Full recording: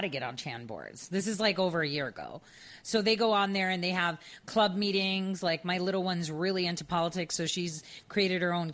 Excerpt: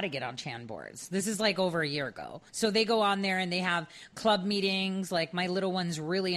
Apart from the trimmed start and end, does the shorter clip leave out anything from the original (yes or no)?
yes